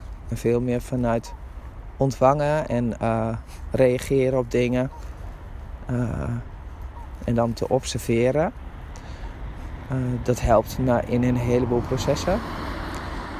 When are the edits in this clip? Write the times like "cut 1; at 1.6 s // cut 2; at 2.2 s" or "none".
none